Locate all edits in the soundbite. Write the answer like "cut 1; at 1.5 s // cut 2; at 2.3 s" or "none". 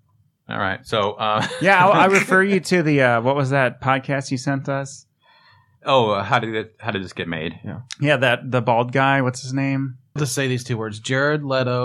cut 1; at 10.2 s